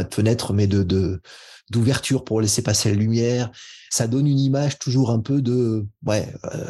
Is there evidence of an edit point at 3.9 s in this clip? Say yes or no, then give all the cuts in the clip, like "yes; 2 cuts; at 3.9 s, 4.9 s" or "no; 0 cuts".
yes; 1 cut; at 3.9 s